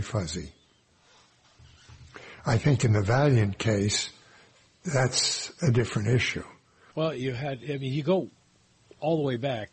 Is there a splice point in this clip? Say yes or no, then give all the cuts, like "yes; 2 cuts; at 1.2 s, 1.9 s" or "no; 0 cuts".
yes; 1 cut; at 6.9 s